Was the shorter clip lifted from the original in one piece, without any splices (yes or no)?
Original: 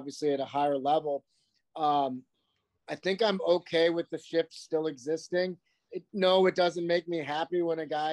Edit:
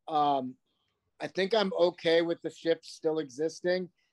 yes